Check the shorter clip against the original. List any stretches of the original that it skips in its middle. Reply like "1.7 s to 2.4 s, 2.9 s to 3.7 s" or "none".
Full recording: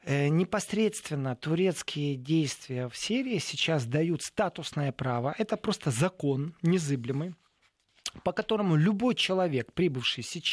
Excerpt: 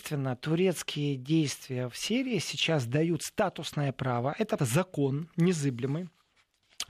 5.6 s to 5.8 s